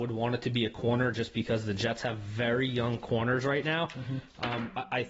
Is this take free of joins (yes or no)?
yes